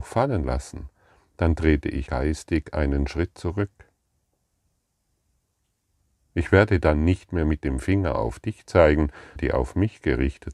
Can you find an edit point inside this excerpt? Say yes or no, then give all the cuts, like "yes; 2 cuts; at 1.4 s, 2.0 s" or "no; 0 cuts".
yes; 2 cuts; at 2.1 s, 9.4 s